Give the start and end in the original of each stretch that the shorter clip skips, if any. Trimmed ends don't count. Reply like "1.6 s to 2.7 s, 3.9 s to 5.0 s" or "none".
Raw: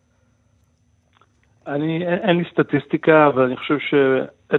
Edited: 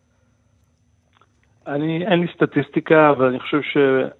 2.1 s to 2.2 s